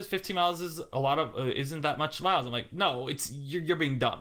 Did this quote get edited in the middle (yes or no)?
no